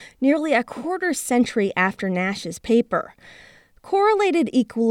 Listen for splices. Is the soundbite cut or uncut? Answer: uncut